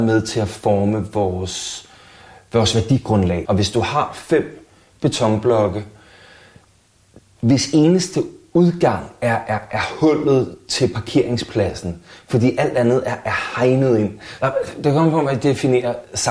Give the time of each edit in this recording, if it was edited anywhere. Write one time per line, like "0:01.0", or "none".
0:03.5
0:14.4